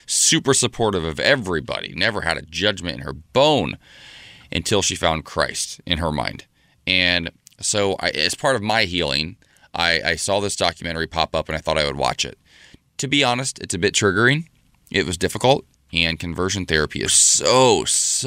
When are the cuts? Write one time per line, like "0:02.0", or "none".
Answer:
0:15.8
0:17.1